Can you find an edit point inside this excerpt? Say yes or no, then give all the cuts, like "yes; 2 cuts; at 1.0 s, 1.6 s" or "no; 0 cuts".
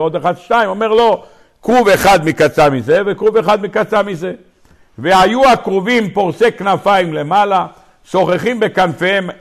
no; 0 cuts